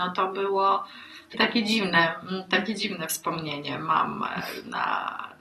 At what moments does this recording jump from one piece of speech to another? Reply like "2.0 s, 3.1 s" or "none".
1.3 s